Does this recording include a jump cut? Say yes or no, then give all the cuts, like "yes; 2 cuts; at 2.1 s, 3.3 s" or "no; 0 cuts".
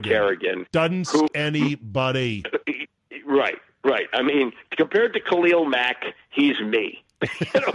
yes; 1 cut; at 1.3 s